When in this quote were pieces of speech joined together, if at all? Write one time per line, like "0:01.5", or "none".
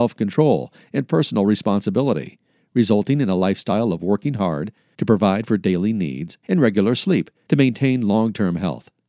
0:06.4